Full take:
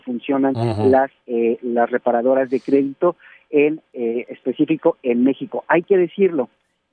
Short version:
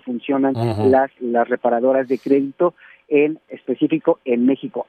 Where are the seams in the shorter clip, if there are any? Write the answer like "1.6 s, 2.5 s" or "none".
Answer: 1.2 s, 3.5 s